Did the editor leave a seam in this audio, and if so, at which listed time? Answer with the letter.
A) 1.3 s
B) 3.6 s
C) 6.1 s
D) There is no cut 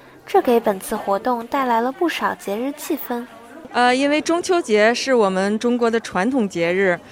B